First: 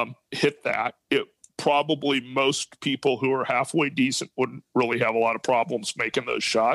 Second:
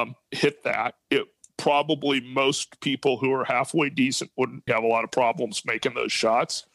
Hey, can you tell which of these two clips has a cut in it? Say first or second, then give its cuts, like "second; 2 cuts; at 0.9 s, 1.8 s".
second; 1 cut; at 4.7 s